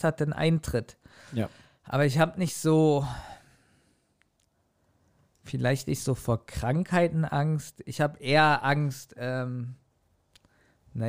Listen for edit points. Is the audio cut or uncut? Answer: uncut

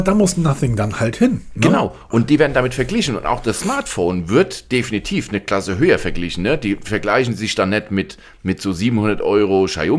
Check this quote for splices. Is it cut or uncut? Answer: uncut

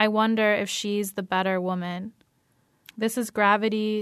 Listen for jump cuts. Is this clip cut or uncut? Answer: cut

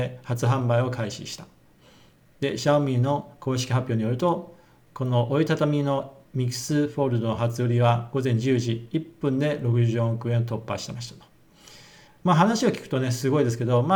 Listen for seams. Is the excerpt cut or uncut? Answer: uncut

